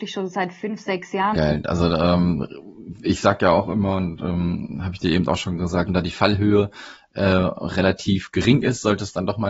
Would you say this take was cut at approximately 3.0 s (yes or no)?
no